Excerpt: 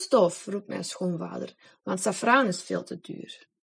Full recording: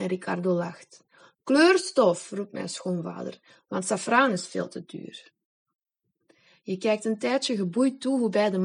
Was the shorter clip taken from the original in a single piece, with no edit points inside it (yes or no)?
yes